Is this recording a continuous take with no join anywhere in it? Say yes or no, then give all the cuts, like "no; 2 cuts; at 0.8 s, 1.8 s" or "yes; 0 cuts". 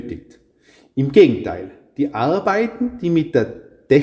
yes; 0 cuts